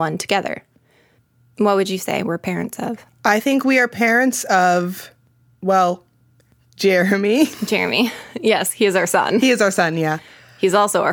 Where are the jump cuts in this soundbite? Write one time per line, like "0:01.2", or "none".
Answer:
0:01.5